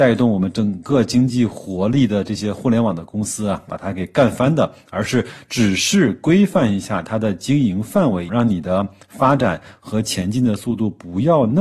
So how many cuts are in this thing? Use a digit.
1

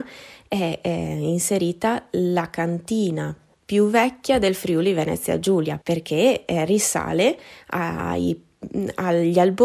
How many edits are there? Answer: 1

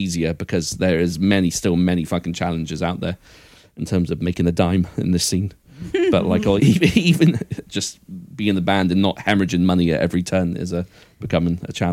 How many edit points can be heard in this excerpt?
2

